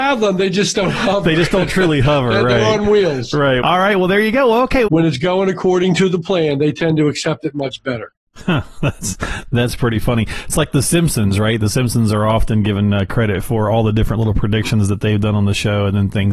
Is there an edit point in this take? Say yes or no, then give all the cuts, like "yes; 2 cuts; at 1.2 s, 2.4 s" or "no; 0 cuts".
yes; 2 cuts; at 3.6 s, 4.9 s